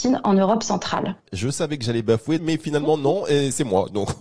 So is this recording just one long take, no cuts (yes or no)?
no